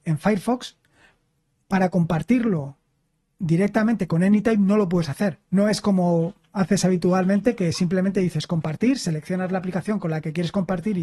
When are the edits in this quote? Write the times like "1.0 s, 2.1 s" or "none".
5.5 s